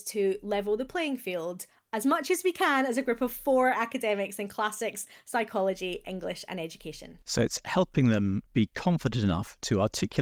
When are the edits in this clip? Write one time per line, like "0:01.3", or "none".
0:07.2
0:08.5